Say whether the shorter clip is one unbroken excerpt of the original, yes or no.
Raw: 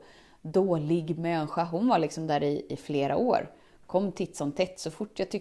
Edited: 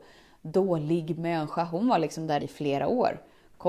no